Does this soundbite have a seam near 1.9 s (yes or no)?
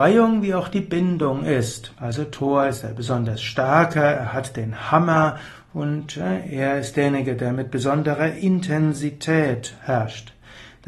yes